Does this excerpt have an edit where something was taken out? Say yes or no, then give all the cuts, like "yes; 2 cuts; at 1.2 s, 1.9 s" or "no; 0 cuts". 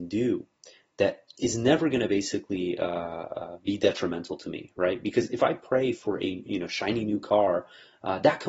no; 0 cuts